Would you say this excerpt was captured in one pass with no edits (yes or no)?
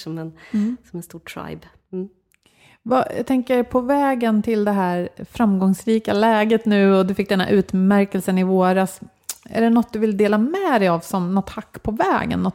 yes